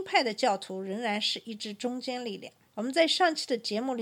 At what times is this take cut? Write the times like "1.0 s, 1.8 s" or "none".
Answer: 2.7 s